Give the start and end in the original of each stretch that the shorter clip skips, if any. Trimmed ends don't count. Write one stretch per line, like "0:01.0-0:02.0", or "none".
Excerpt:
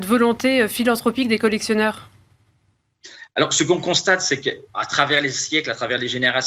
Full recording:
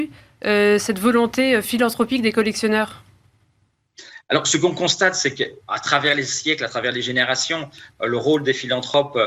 none